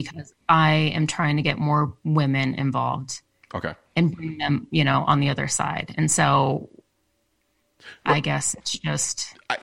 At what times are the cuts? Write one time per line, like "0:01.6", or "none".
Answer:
none

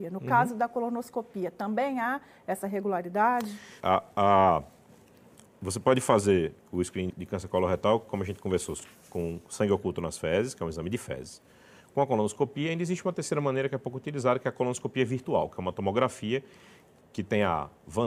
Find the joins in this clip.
0:03.8
0:07.1
0:17.0

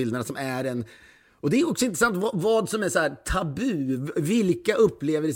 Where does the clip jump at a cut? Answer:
none

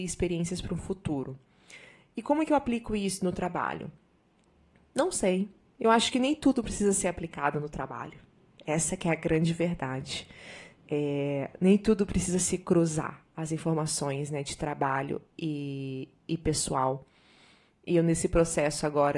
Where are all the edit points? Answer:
none

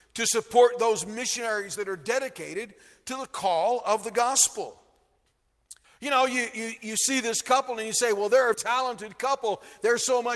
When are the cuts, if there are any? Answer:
0:05.8
0:08.5

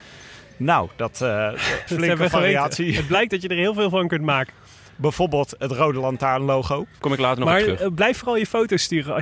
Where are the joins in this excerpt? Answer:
0:01.9
0:07.0

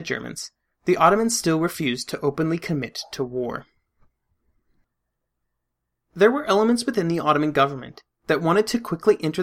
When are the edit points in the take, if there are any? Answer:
none

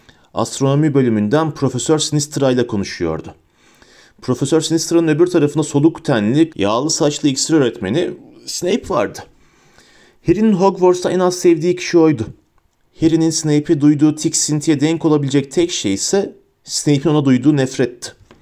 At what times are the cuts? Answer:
0:06.5

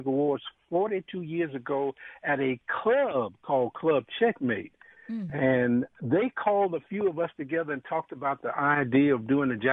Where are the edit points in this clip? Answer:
none

